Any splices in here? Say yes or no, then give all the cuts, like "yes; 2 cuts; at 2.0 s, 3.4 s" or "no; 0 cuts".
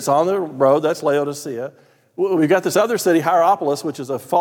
no; 0 cuts